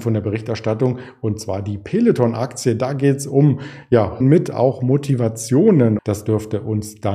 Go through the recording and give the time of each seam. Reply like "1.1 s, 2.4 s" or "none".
4.2 s, 6.0 s